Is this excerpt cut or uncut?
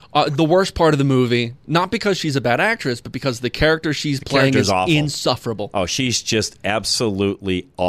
uncut